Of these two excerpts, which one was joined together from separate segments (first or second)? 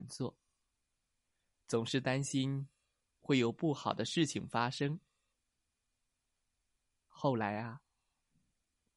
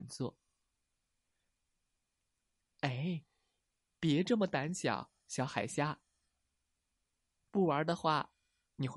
second